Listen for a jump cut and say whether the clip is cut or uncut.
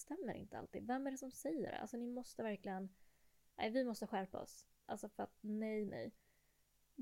cut